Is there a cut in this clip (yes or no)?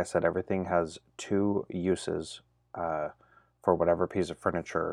no